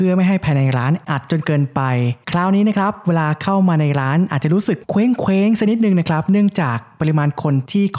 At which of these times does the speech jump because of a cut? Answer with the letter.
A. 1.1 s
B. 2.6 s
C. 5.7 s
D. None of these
A